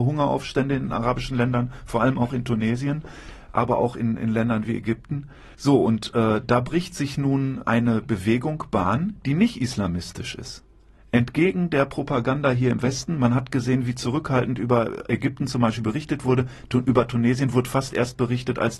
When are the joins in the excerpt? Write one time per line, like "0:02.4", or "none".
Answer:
none